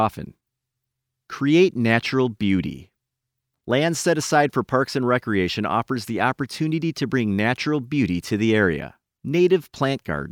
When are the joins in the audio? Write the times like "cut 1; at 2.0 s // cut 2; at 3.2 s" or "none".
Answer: cut 1; at 9.1 s